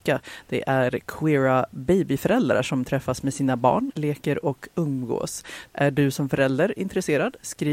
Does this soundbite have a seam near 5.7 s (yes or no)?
yes